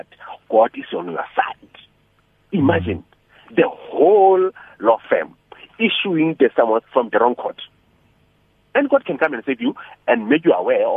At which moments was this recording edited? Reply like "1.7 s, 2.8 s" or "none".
none